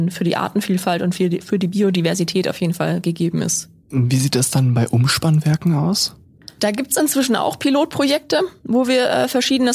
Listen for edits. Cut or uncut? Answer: uncut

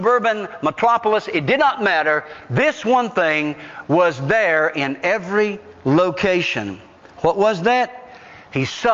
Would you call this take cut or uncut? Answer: uncut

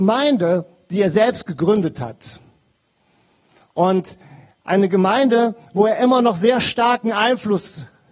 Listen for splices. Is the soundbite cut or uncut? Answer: uncut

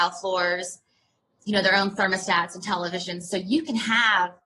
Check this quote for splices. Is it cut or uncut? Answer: uncut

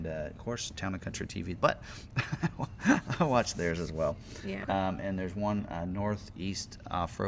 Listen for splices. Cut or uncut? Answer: cut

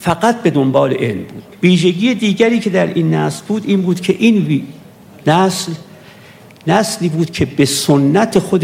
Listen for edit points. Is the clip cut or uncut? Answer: cut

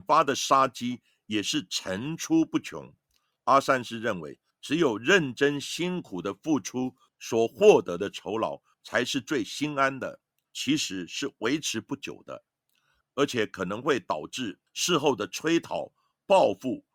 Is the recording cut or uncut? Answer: cut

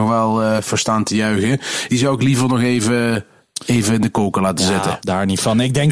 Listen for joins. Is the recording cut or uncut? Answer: cut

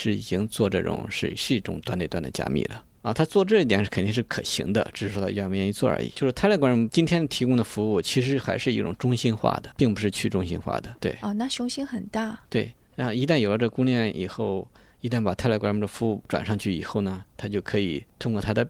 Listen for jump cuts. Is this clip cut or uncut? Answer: cut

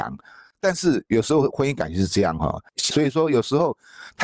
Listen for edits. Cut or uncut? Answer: cut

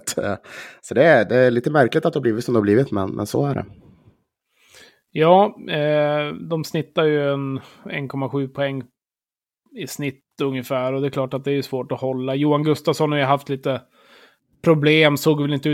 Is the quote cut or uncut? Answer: uncut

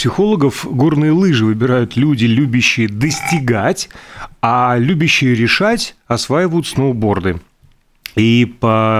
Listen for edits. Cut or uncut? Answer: uncut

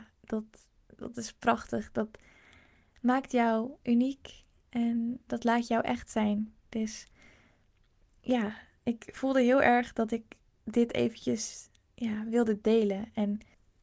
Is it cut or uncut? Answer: uncut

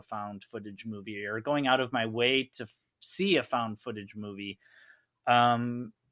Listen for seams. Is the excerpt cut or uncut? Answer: uncut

